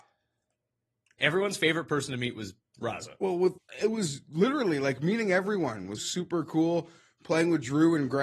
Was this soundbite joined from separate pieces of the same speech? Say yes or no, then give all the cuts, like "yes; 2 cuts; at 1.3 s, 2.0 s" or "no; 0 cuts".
yes; 2 cuts; at 3.6 s, 6.0 s